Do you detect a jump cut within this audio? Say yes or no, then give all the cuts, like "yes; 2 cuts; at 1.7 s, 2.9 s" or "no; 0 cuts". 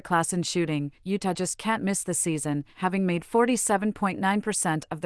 no; 0 cuts